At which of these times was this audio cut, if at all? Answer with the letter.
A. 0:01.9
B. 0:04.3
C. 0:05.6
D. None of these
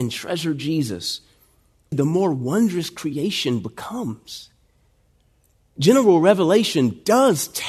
A